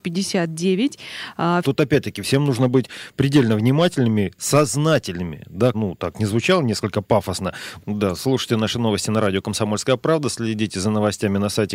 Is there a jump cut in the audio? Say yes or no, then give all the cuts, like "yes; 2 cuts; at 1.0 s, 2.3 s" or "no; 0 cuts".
yes; 3 cuts; at 1.6 s, 5.7 s, 7.8 s